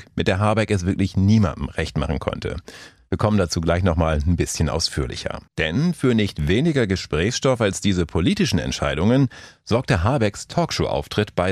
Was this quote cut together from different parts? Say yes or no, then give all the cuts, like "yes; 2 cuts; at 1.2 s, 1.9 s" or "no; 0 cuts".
yes; 1 cut; at 5.5 s